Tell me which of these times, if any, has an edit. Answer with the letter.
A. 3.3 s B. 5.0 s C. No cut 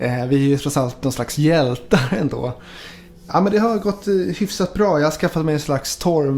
C